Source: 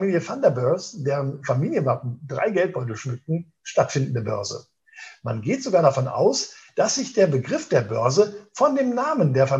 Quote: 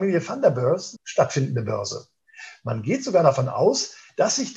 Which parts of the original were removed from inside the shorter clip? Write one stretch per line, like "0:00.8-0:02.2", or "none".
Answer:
0:01.0-0:03.5